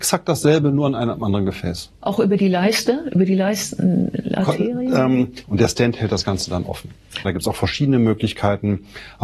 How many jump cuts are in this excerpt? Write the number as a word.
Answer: two